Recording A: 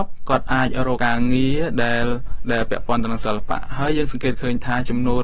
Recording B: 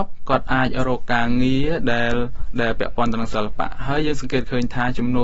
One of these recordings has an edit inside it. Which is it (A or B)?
A